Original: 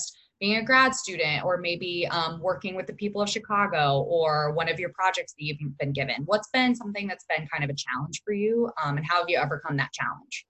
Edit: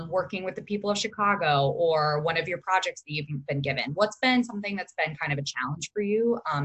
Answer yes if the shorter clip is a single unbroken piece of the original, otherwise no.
yes